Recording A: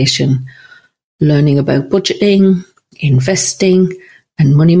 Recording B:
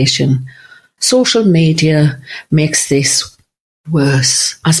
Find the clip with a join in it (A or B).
B